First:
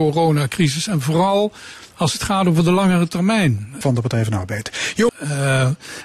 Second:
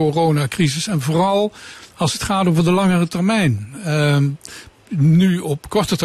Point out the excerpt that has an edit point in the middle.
first; 2 cuts; at 3.8 s, 5.1 s

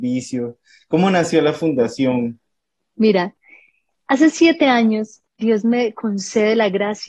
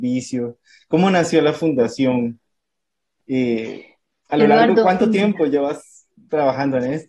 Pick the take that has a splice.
first; 2 cuts; at 2.8 s, 5.3 s

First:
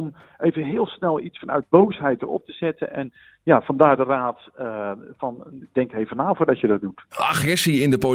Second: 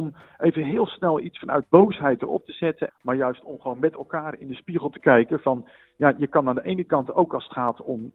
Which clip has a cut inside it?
second; 1 cut; at 2.9 s

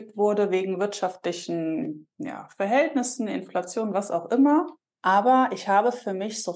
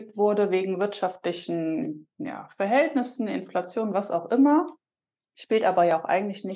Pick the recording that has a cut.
first; 1 cut; at 4.9 s

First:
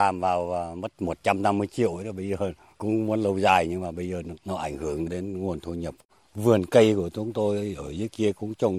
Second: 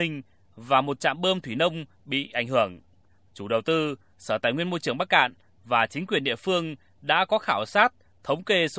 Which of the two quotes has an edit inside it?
first; 1 cut; at 5.1 s

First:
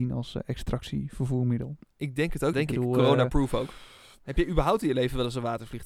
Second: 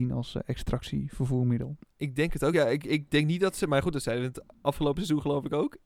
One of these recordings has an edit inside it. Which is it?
first; 2 cuts; at 2.5 s, 4.2 s

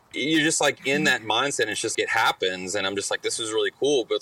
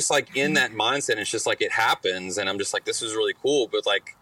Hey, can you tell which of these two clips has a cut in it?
first; 1 cut; at 1.9 s

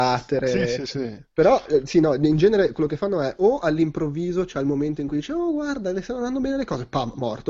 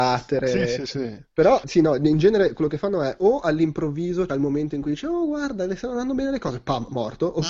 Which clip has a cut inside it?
second; 2 cuts; at 1.6 s, 4.3 s

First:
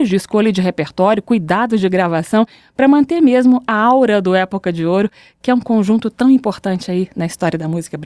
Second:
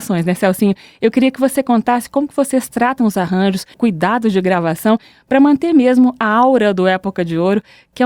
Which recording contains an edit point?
second; 1 cut; at 3.7 s

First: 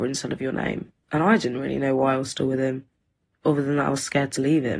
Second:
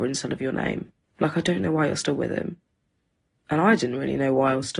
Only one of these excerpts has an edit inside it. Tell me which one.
first; 1 cut; at 1.0 s

